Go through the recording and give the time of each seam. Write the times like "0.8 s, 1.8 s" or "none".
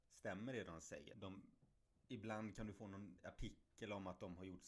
1.1 s